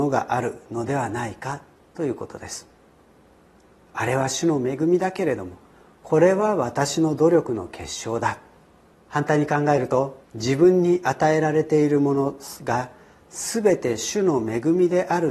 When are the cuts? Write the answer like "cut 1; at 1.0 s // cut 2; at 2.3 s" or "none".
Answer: cut 1; at 8.9 s // cut 2; at 10.2 s